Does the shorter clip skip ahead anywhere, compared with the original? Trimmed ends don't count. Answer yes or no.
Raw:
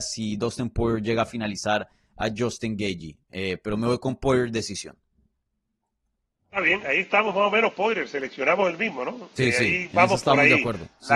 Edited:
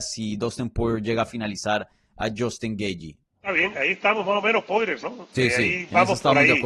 yes